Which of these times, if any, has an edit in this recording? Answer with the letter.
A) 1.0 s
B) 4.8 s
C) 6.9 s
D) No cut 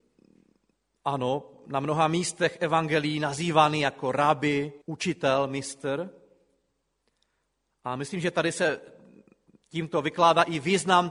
B